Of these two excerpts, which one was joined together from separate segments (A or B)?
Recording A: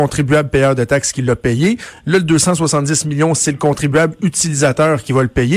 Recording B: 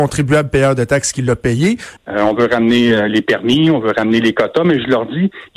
B